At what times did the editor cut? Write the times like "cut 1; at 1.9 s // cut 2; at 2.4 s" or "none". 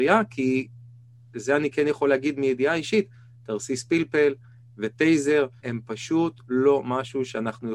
cut 1; at 5.6 s